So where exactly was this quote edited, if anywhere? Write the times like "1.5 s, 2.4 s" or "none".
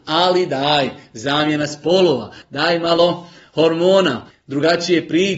2.4 s, 4.3 s